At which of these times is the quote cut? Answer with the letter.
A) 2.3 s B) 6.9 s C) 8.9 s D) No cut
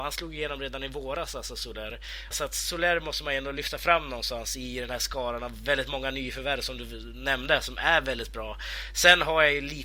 A